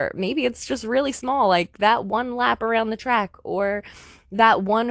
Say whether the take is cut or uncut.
uncut